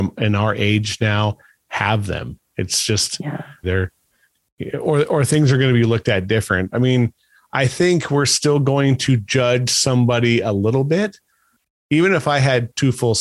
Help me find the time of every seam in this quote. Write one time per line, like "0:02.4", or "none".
0:03.6

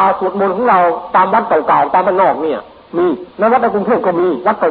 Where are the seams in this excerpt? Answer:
0:03.3

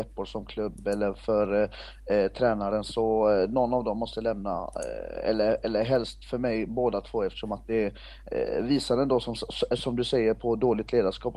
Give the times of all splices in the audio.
none

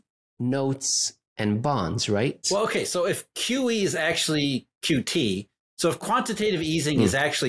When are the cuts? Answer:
0:02.4

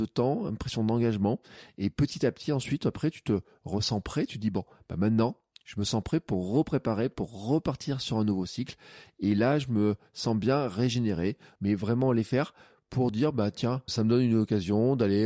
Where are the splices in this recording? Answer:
0:11.5
0:13.9

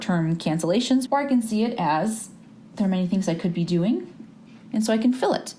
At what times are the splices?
0:01.1
0:04.7

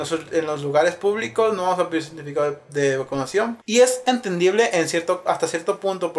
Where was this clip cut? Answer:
0:03.6
0:05.3

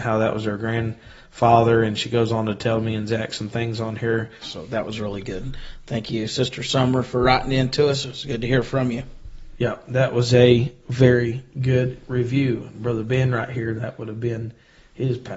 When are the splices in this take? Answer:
0:04.4

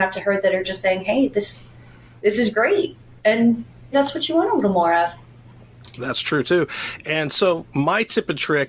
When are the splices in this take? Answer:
0:03.9

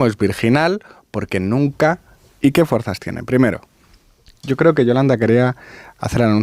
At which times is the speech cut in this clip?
0:02.3

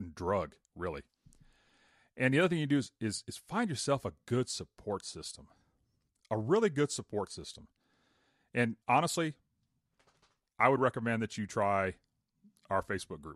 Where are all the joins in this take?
0:08.8

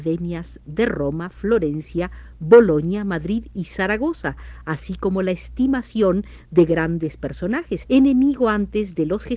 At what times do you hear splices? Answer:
0:07.8

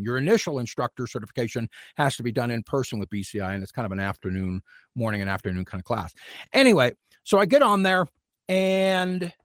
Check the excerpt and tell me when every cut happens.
none

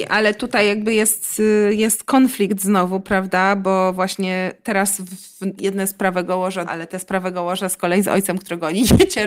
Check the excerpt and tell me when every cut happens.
0:05.6
0:06.7

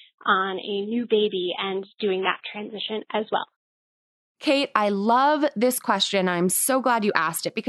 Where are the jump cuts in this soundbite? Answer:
none

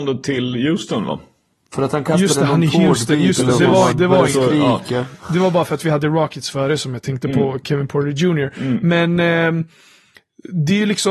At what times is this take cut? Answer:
0:03.9

